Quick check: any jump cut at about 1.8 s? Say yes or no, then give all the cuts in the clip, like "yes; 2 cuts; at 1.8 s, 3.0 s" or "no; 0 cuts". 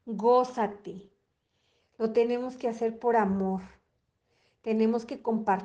yes; 1 cut; at 1.8 s